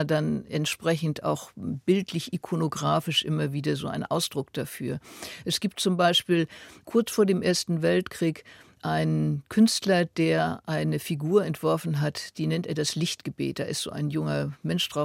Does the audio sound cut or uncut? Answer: uncut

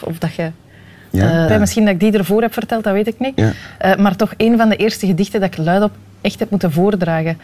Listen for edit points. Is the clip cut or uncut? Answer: cut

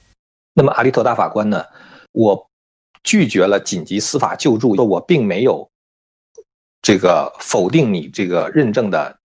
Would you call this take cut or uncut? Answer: cut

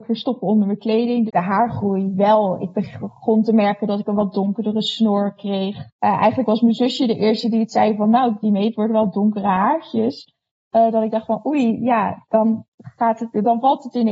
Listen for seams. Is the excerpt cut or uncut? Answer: cut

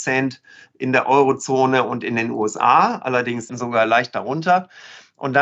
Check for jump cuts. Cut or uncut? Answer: cut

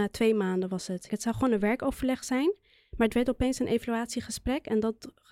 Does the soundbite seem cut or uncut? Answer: cut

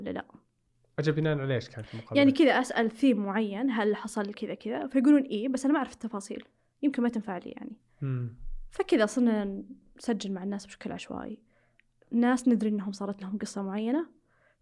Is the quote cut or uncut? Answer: cut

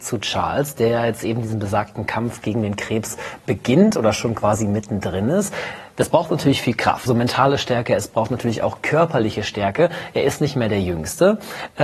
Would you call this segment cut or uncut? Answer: cut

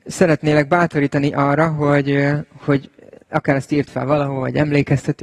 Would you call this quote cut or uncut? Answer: uncut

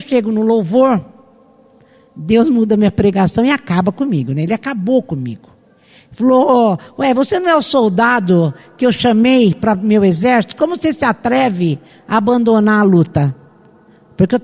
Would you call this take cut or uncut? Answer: uncut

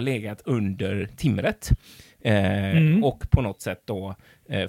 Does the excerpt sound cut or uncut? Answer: uncut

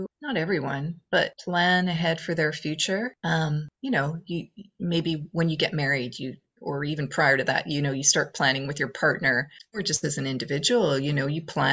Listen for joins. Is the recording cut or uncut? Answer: uncut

